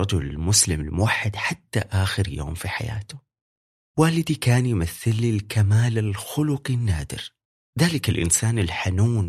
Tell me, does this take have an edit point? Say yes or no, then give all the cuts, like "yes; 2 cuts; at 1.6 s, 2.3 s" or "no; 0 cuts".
no; 0 cuts